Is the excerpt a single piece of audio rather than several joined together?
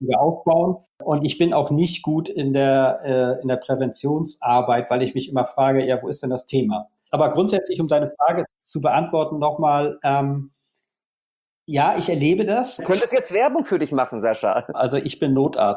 no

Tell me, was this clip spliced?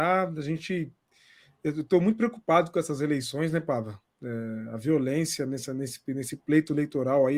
no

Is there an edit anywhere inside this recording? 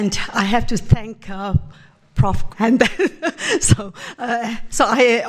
yes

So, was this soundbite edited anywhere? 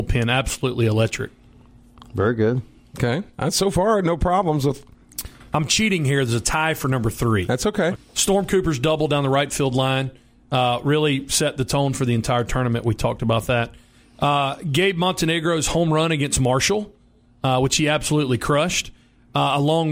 yes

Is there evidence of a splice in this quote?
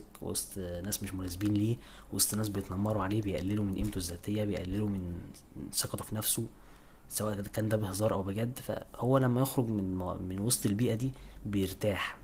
no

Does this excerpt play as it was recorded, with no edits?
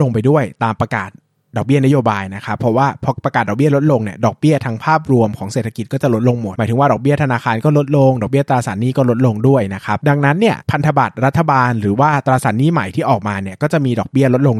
yes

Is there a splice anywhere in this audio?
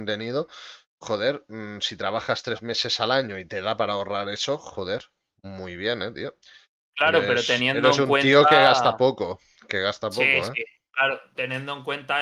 no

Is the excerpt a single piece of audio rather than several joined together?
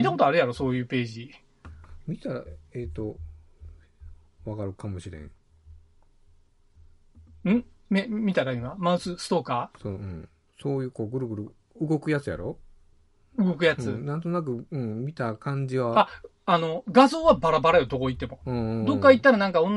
yes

